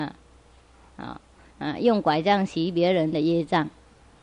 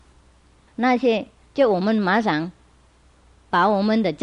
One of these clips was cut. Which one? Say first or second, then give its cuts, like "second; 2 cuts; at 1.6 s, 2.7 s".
first; 1 cut; at 1.5 s